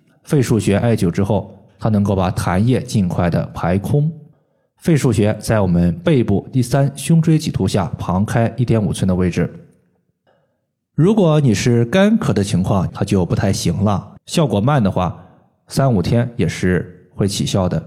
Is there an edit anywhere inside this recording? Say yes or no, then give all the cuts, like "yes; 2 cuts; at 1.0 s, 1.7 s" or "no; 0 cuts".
yes; 2 cuts; at 12.9 s, 14.2 s